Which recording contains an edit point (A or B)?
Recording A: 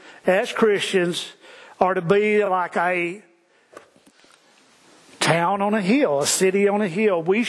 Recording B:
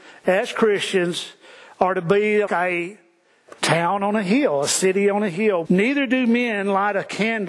B